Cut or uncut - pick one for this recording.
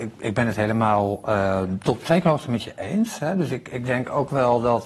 uncut